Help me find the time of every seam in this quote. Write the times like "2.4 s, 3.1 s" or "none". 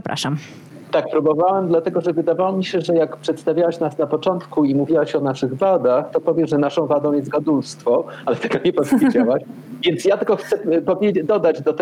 none